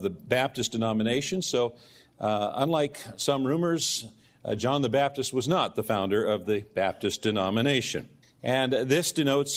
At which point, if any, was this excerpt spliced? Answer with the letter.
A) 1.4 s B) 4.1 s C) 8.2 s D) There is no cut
C